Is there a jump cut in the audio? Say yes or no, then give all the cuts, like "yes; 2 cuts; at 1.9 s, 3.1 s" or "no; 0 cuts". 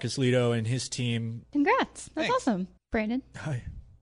yes; 2 cuts; at 1.4 s, 2.8 s